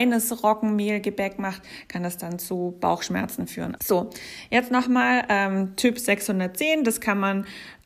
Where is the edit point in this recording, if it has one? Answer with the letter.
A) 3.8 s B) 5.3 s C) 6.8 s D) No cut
A